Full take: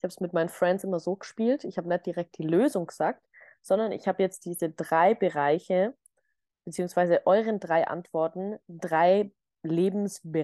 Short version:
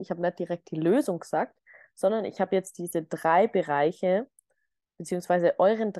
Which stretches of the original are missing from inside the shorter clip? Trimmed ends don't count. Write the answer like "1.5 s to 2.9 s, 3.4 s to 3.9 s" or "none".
none